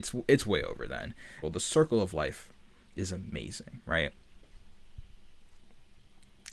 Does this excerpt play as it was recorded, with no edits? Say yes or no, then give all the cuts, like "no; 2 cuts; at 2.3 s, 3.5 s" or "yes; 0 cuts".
no; 1 cut; at 1.4 s